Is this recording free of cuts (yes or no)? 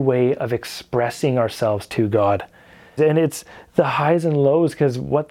no